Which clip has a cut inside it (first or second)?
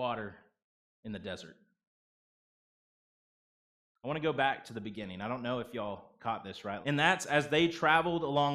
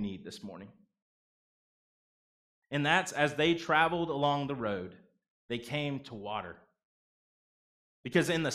first